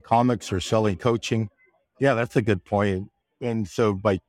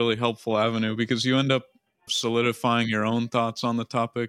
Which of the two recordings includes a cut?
first; 2 cuts; at 1.8 s, 3.2 s

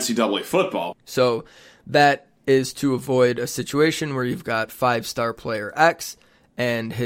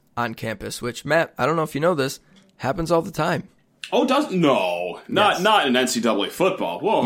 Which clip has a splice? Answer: first; 1 cut; at 0.9 s

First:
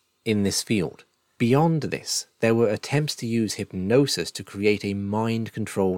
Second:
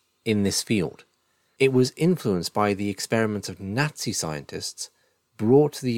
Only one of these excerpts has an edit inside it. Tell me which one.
first; 1 cut; at 1.4 s

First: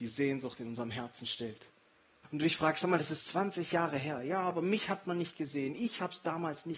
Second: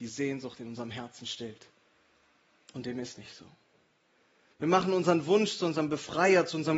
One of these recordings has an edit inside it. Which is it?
first; 1 cut; at 2.2 s

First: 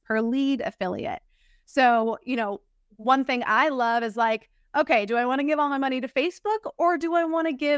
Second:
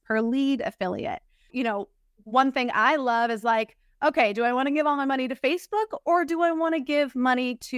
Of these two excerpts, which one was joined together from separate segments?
second; 1 cut; at 1.5 s

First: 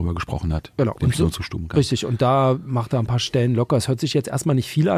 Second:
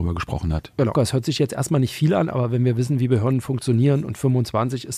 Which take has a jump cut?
second; 1 cut; at 0.9 s

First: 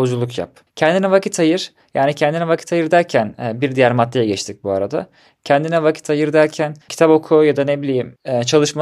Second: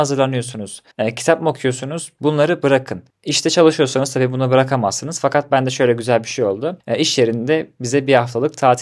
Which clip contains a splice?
second; 1 cut; at 0.9 s

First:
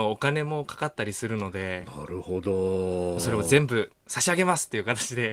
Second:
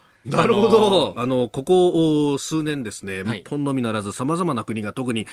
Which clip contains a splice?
second; 2 cuts; at 1.1 s, 3.2 s

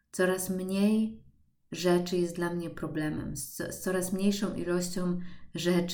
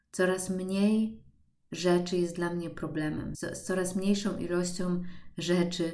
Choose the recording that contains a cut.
second; 1 cut; at 3.3 s

